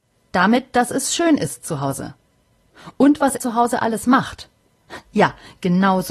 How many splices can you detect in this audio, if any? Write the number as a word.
one